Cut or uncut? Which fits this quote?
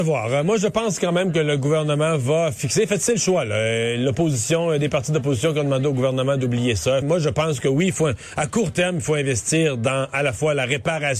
cut